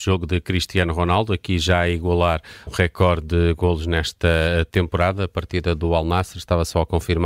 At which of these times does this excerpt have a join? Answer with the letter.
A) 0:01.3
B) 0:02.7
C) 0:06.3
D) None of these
B